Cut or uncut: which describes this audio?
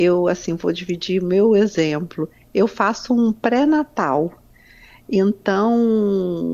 uncut